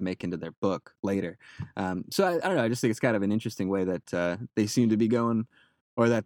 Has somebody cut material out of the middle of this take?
no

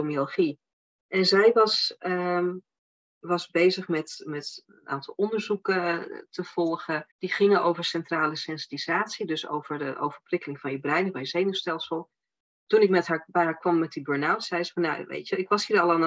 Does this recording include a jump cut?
yes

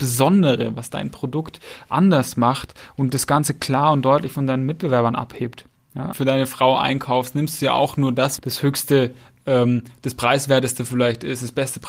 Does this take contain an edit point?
yes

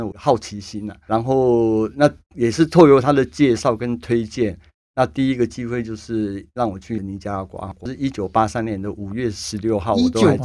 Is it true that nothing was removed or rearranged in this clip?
yes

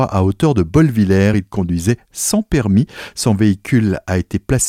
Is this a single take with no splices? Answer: yes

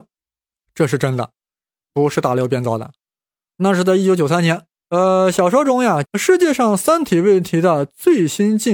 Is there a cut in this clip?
yes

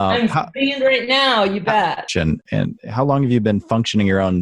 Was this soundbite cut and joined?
yes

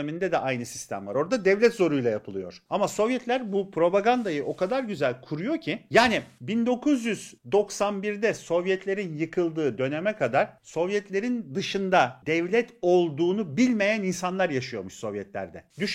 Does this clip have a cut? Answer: no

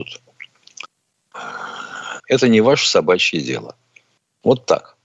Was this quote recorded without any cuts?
no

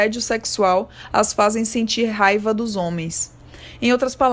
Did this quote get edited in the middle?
no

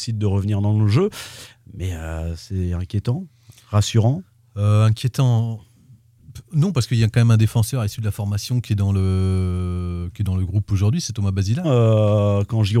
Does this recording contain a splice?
yes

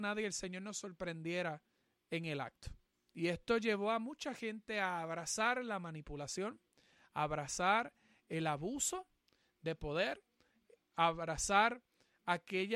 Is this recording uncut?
yes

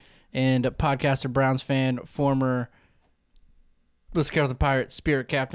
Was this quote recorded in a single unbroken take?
yes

